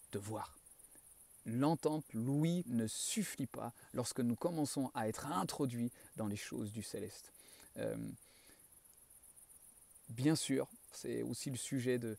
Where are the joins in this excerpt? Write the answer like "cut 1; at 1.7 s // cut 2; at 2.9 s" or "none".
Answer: cut 1; at 2.6 s // cut 2; at 10.9 s

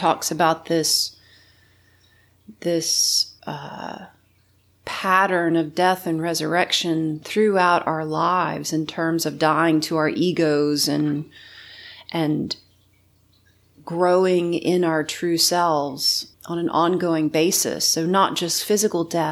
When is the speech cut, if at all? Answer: cut 1; at 3.4 s // cut 2; at 16.3 s

